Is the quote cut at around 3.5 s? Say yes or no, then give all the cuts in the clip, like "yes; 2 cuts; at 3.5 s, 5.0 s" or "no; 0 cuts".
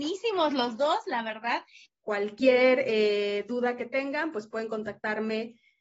no; 1 cut; at 1.8 s